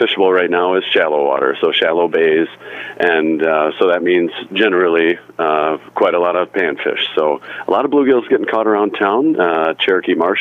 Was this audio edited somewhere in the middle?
no; 0 cuts

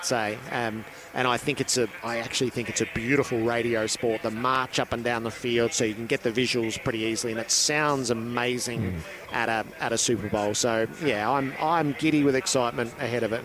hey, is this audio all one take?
yes; 0 cuts

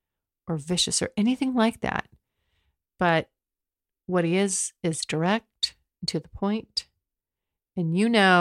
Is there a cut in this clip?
no; 0 cuts

